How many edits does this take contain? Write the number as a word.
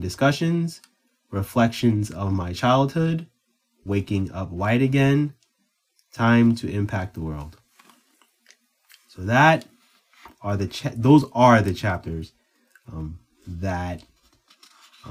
zero